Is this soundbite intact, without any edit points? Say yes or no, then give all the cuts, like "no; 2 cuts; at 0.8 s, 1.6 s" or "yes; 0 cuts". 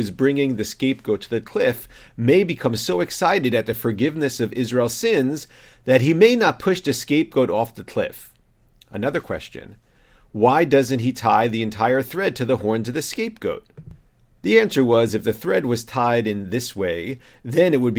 yes; 0 cuts